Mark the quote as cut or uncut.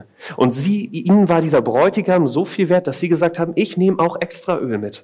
uncut